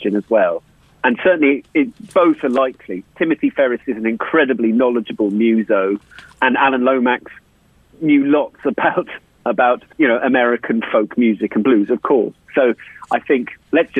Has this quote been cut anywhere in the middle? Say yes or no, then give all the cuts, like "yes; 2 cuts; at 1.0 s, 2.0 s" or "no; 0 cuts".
yes; 1 cut; at 9.9 s